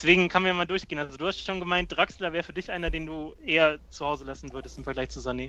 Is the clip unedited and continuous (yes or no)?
yes